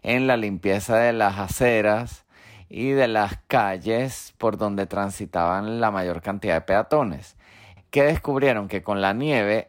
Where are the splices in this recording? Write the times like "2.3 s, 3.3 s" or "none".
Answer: 7.8 s